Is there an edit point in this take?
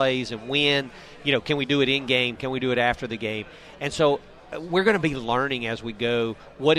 no; 0 cuts

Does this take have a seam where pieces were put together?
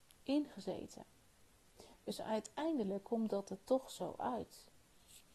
no; 0 cuts

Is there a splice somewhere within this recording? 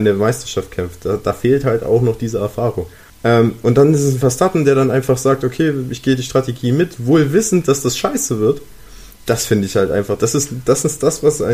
yes; 1 cut; at 3.1 s

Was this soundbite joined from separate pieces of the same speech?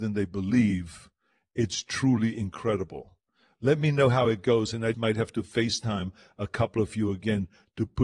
yes; 1 cut; at 4.9 s

